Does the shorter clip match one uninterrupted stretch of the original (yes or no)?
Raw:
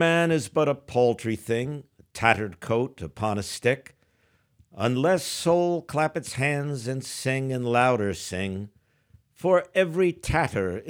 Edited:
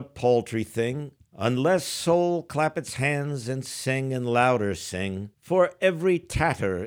no